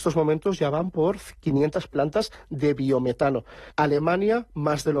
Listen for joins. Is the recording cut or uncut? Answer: cut